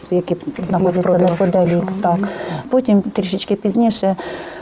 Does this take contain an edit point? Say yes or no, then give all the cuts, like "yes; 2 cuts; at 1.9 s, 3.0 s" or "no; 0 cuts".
yes; 1 cut; at 3.0 s